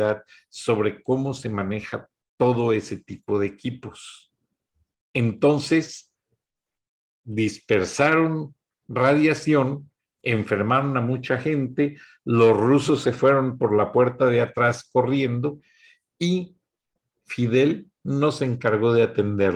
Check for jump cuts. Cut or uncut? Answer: uncut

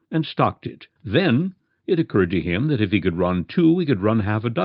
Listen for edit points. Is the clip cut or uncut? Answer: cut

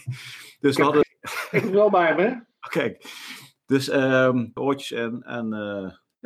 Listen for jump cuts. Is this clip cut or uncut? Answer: cut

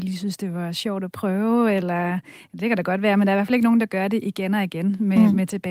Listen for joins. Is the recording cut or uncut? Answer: uncut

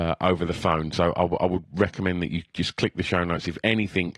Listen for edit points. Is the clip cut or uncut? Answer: uncut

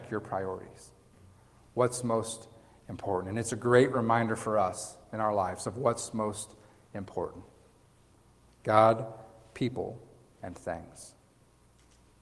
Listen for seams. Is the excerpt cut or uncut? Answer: uncut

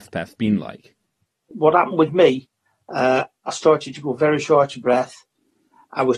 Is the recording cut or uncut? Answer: uncut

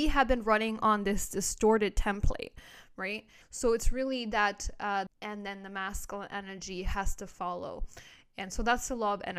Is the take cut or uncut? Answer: cut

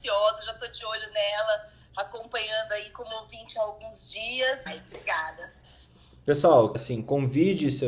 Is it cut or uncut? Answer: cut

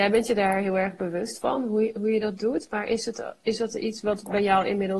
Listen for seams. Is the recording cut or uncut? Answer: uncut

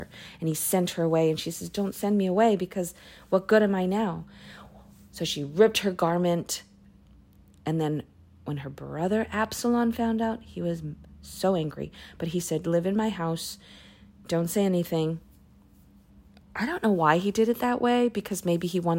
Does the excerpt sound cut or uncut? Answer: uncut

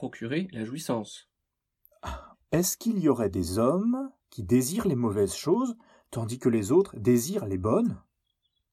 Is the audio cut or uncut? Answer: cut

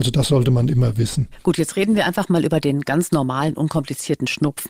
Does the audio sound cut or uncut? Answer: uncut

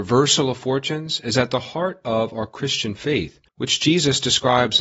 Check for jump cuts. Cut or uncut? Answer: cut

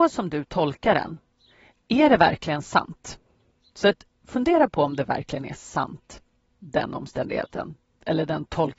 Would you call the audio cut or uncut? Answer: cut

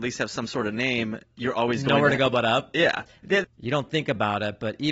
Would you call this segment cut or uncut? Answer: cut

